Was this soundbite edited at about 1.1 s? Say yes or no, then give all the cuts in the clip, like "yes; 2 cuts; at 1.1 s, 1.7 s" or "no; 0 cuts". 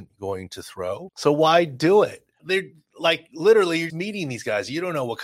yes; 3 cuts; at 1.1 s, 2.4 s, 3.9 s